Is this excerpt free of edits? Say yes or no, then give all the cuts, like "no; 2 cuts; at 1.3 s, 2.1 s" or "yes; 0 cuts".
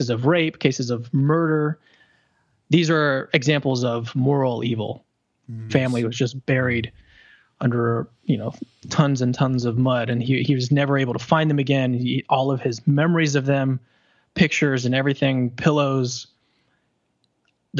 no; 1 cut; at 5.7 s